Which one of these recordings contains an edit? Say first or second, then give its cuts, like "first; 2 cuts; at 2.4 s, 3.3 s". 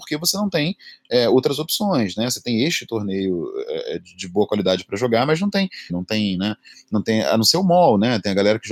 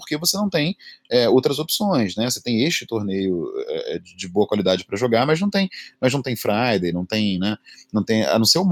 first; 1 cut; at 5.9 s